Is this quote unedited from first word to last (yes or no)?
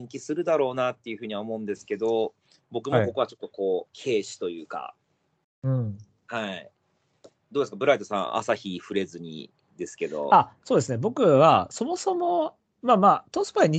yes